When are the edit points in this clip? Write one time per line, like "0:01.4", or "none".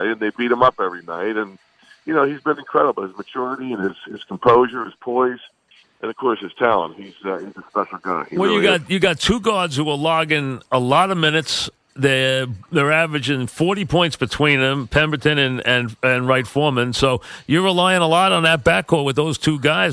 none

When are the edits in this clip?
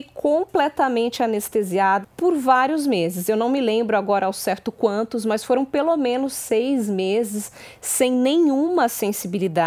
0:02.0

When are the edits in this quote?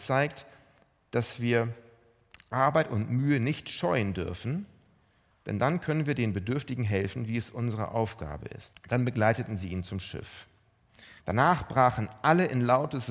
0:08.7
0:11.2

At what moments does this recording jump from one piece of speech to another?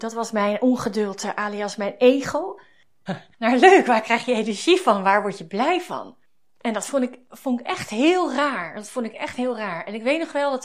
0:03.1

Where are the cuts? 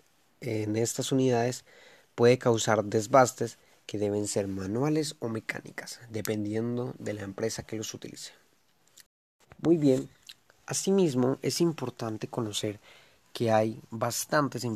none

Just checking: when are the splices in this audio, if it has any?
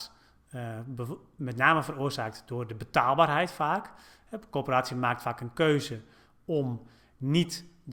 none

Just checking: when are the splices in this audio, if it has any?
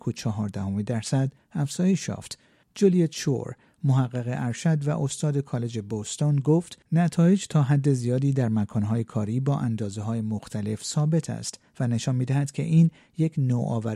0:02.6
0:06.8

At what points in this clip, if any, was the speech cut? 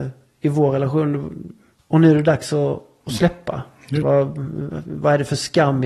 0:01.8
0:04.0

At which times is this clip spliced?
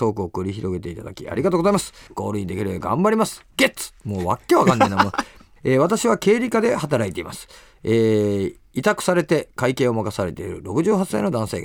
0:02.1
0:05.6

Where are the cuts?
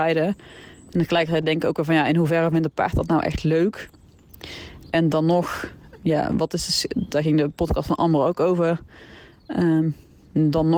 0:06.0

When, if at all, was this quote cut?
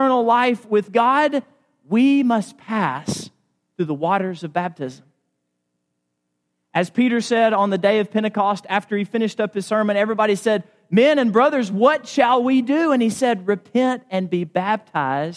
none

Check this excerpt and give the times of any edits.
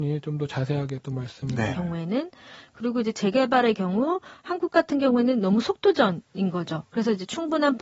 0:01.7

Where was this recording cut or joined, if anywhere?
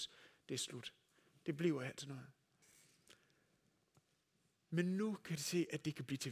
none

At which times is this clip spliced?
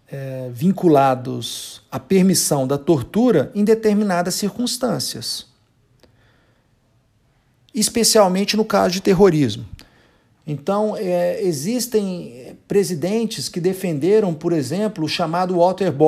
none

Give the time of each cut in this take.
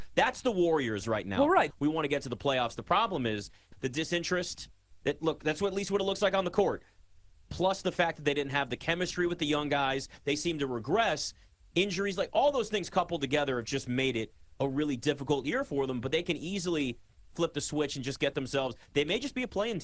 0:01.7
0:03.7

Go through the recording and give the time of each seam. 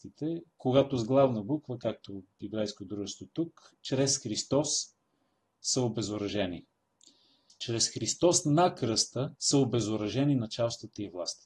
0:07.5
0:09.3

